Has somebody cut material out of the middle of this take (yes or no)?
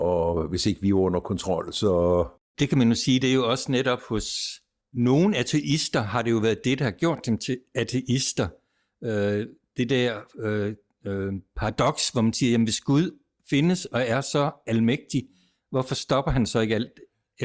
no